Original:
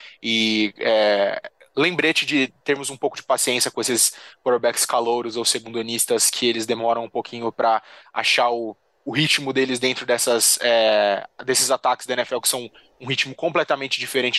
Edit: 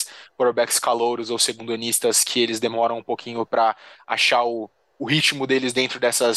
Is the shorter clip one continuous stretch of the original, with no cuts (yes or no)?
yes